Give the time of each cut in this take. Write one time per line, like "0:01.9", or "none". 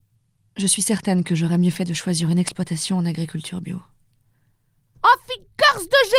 0:04.9